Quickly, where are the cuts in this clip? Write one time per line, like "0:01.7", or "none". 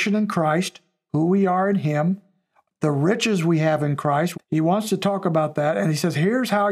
0:04.3